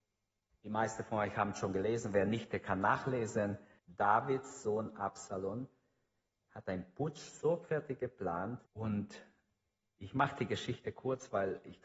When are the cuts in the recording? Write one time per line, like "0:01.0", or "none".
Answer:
0:03.8
0:08.7